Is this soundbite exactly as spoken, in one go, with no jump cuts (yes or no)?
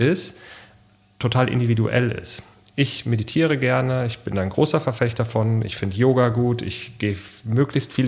yes